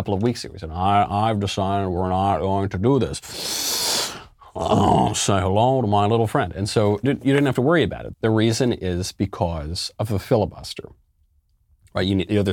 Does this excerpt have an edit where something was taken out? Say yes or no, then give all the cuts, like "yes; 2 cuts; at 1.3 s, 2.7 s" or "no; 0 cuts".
yes; 2 cuts; at 7.0 s, 8.1 s